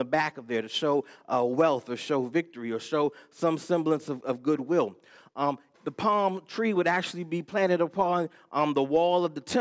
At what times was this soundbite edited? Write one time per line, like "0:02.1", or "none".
0:05.7